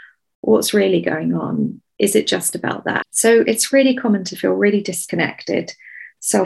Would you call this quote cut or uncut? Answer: cut